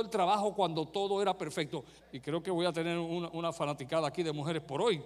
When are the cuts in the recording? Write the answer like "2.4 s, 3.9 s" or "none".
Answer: 2.0 s